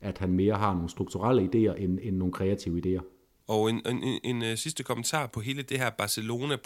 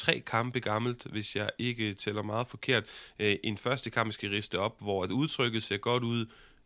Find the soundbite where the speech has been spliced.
first; 1 cut; at 3.4 s

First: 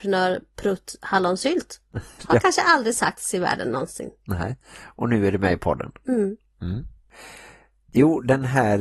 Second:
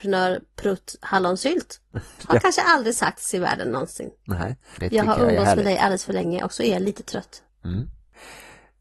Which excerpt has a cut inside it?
second; 2 cuts; at 4.8 s, 7.5 s

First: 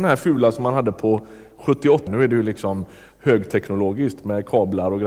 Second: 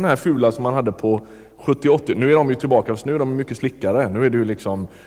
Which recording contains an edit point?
first; 1 cut; at 2.1 s

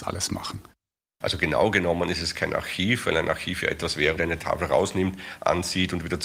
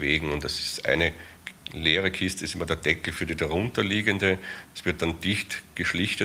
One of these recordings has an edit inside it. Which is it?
first; 2 cuts; at 1.2 s, 4.2 s

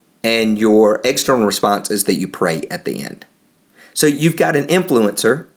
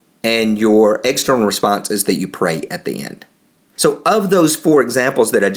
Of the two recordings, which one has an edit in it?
second; 1 cut; at 3.8 s

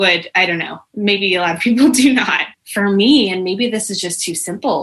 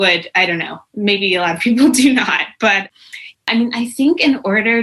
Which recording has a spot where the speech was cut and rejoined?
first; 1 cut; at 2.5 s

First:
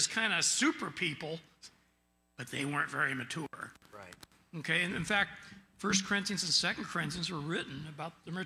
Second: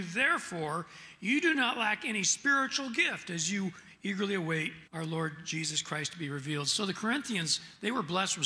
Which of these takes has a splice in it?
second; 1 cut; at 4.9 s

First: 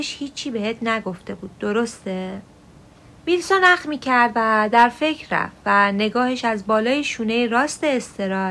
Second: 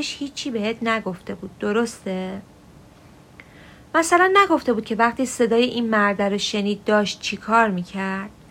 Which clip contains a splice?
first; 1 cut; at 3.1 s

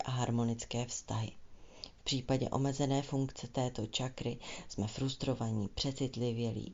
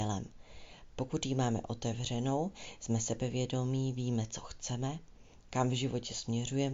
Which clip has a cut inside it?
second; 1 cut; at 0.9 s

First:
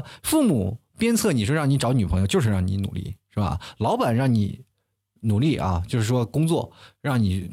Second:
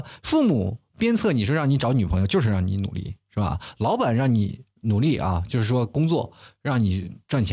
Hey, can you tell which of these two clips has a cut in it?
second; 1 cut; at 4.7 s

